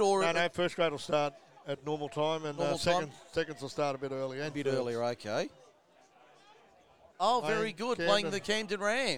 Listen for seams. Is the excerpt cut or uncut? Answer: cut